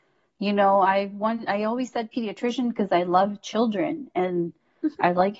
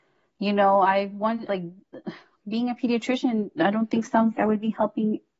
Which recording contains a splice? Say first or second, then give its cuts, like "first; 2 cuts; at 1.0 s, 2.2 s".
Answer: second; 2 cuts; at 1.5 s, 4.4 s